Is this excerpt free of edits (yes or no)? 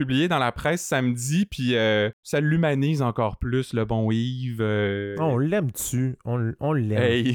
yes